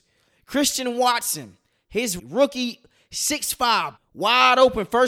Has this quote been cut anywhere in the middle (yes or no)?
yes